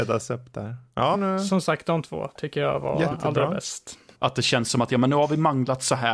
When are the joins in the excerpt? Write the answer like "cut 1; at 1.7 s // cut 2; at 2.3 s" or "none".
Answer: cut 1; at 1.1 s // cut 2; at 4.1 s